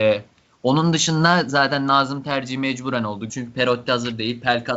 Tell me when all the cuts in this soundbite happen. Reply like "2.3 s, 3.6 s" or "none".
3.3 s